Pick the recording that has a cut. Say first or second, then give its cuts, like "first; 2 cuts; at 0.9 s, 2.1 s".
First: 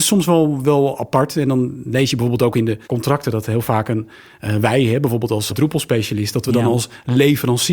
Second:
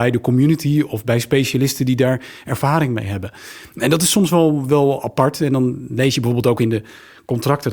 first; 2 cuts; at 2.8 s, 5.5 s